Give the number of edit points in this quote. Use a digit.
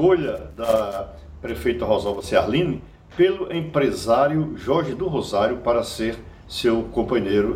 0